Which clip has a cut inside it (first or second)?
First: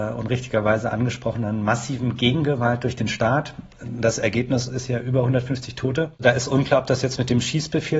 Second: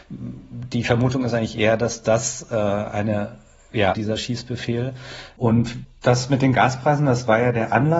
second